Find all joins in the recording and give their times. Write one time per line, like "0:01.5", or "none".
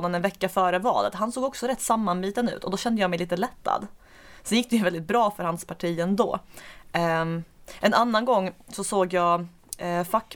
none